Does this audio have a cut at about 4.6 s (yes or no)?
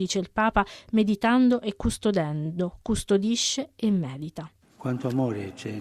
yes